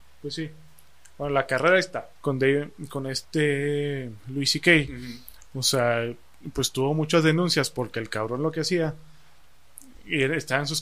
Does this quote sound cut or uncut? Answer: cut